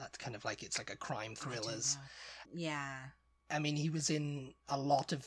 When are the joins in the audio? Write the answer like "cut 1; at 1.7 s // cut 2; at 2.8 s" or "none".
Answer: cut 1; at 2.4 s